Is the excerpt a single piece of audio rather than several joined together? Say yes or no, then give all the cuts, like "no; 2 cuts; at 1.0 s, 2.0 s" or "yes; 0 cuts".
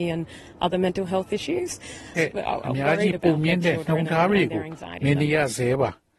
no; 1 cut; at 2.1 s